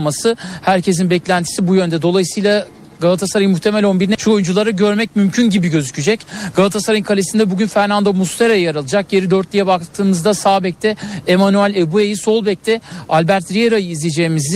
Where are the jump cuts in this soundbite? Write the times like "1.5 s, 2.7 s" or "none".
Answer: none